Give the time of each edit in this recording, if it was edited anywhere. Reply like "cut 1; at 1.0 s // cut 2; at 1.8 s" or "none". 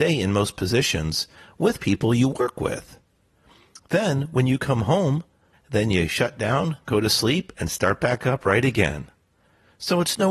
cut 1; at 5.5 s